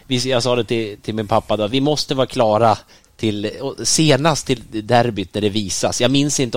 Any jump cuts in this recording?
no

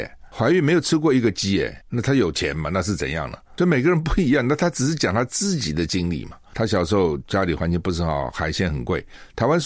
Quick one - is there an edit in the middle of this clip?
yes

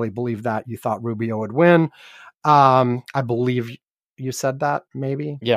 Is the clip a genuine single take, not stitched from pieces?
yes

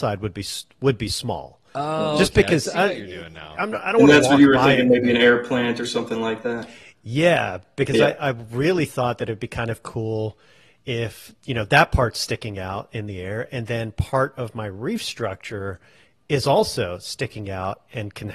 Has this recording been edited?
yes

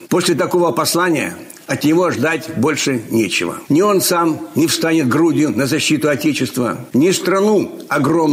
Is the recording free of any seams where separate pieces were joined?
yes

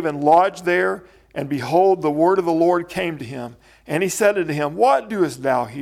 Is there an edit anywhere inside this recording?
no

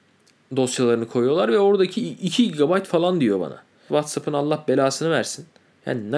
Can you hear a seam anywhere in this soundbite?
yes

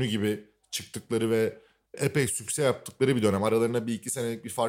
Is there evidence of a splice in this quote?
no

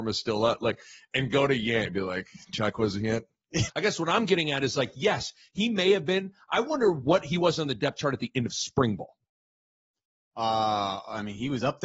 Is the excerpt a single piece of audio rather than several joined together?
no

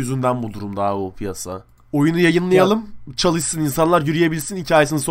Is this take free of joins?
yes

